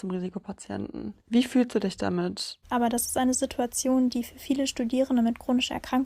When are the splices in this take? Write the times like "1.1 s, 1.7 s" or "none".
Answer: 1.2 s, 2.6 s

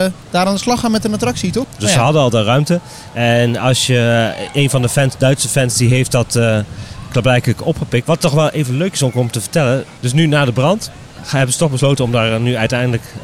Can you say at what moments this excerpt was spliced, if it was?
1.6 s, 8.0 s, 10.0 s

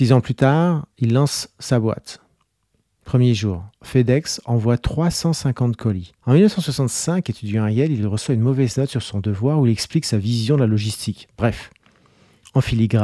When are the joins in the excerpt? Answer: 6.2 s

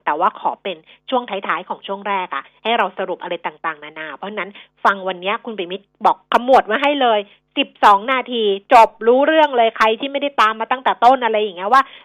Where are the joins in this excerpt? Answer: none

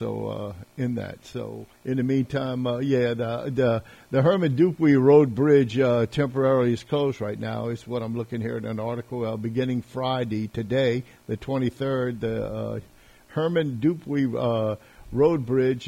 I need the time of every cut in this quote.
1.8 s

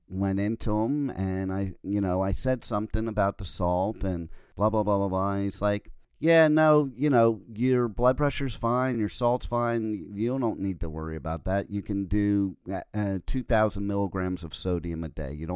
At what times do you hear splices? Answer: none

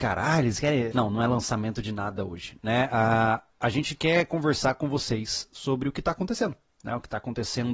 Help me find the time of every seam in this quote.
0.9 s

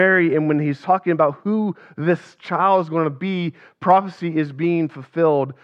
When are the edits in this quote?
none

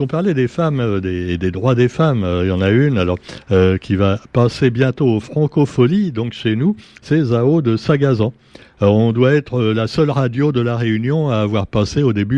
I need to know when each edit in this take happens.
none

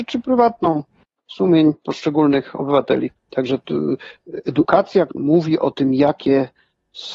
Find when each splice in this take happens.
3.2 s, 5.1 s

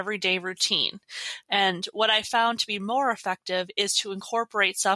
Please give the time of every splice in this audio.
1.4 s

